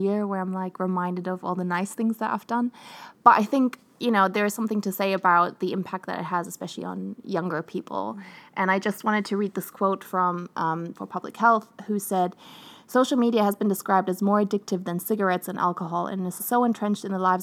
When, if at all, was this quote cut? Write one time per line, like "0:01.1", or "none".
0:10.9
0:16.4